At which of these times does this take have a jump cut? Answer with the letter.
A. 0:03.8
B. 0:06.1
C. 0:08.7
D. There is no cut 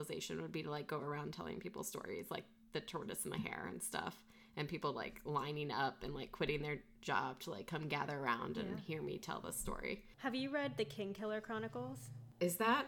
D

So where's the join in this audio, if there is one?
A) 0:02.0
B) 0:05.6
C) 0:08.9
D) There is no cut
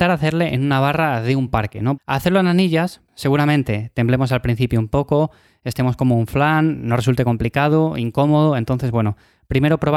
A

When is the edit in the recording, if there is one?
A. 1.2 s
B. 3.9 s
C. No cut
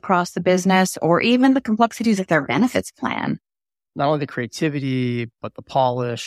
B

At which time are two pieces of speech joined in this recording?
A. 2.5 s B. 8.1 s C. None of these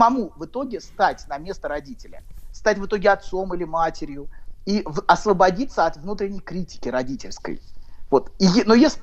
A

